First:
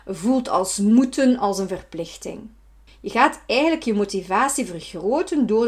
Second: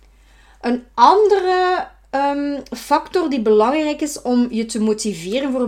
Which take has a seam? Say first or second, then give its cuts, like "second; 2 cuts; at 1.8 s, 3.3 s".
first; 1 cut; at 2.9 s